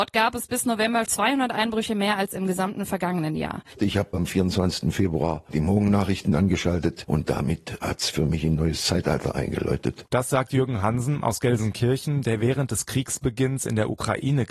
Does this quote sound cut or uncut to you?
cut